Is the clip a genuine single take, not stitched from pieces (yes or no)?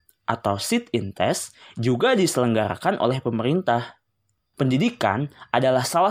no